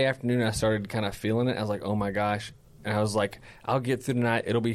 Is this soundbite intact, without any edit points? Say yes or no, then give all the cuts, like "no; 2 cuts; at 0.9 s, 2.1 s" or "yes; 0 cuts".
yes; 0 cuts